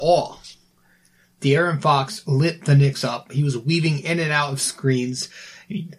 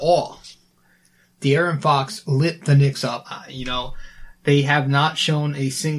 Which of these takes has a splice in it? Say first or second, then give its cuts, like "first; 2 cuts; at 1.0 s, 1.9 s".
second; 1 cut; at 3.2 s